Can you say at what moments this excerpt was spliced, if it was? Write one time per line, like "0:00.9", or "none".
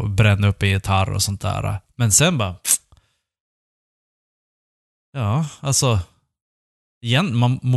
none